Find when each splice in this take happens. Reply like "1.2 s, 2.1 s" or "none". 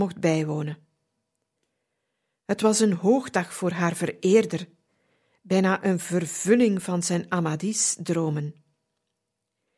none